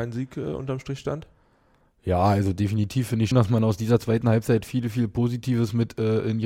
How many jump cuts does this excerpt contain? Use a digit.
1